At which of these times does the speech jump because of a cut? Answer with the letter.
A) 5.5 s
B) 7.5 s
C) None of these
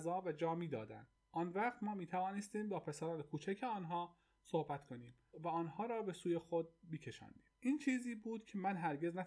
B